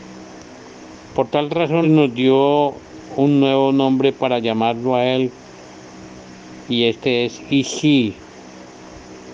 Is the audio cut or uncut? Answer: cut